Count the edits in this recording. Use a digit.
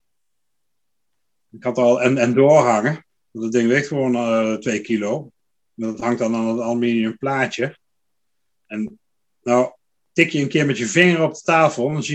0